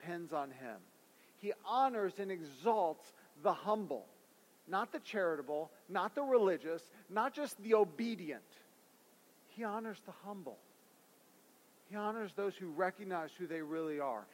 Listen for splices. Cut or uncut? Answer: uncut